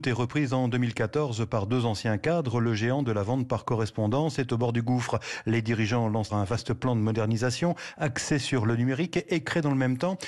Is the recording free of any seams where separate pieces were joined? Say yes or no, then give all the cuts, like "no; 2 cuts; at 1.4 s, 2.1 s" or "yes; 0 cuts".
no; 1 cut; at 6.3 s